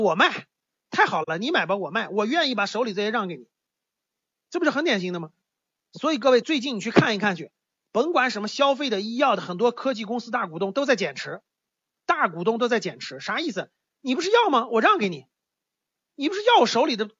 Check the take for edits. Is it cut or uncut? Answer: uncut